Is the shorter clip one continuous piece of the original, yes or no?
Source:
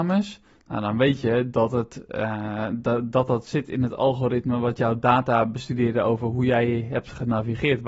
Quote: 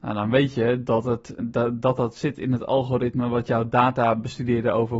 no